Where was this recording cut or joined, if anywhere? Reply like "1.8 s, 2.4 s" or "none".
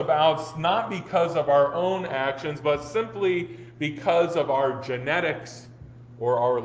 none